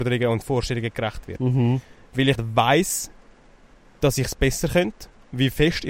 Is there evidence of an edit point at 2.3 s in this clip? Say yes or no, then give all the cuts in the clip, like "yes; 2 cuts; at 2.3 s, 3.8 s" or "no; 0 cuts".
yes; 1 cut; at 2.3 s